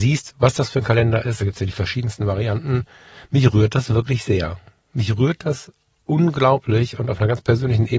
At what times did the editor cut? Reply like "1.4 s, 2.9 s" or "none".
none